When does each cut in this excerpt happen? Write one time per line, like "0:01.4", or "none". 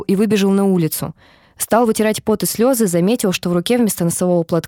none